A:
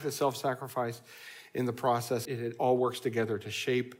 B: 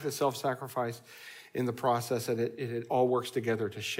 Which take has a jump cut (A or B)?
A